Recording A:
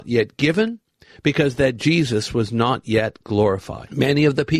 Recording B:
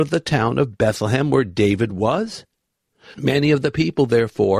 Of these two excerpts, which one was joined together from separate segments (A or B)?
B